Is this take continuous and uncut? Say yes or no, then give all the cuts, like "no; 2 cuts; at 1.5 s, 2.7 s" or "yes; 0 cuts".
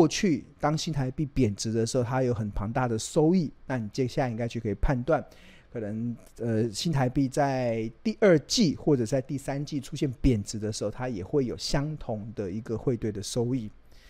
yes; 0 cuts